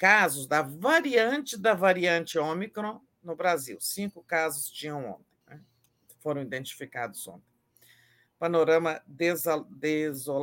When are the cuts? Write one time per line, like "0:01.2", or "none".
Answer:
0:05.4